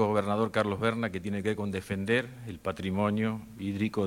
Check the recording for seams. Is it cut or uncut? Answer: uncut